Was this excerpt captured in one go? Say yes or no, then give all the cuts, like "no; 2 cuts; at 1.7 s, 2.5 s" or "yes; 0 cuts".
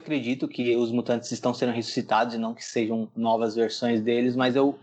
yes; 0 cuts